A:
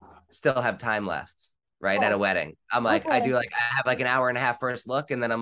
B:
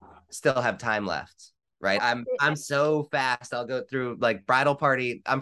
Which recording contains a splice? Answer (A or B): B